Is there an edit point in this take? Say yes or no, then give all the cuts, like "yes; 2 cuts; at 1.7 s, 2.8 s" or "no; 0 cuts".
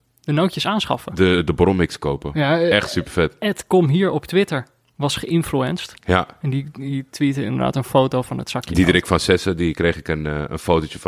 no; 0 cuts